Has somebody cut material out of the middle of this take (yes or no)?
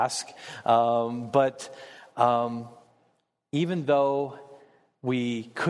no